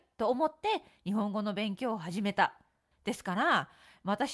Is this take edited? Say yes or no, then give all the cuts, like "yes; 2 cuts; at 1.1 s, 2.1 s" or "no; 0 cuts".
yes; 1 cut; at 2.9 s